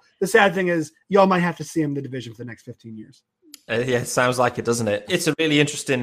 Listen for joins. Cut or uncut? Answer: cut